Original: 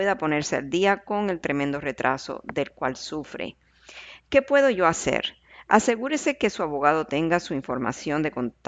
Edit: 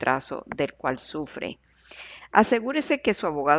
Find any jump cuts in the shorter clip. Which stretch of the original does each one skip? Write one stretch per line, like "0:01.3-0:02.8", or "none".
0:04.2-0:05.6